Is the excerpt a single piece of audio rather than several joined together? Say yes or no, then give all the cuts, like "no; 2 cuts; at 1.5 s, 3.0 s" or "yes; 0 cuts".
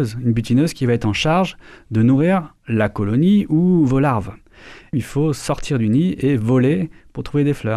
no; 1 cut; at 4.9 s